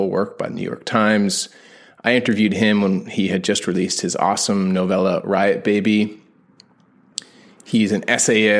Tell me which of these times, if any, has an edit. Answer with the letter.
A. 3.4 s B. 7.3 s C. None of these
C